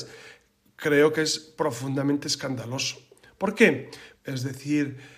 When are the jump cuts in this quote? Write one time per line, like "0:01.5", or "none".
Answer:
0:04.1